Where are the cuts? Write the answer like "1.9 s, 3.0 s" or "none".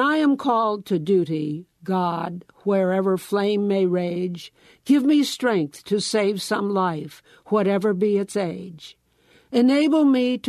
none